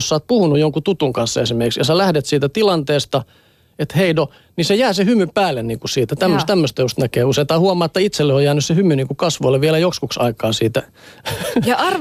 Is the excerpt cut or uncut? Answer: uncut